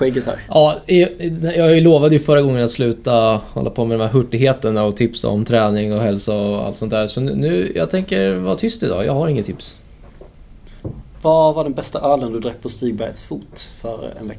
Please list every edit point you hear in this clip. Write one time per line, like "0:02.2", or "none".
none